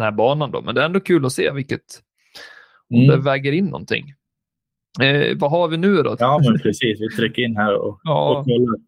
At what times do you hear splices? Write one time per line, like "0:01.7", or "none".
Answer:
0:06.2